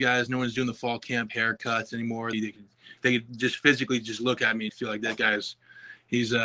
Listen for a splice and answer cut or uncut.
cut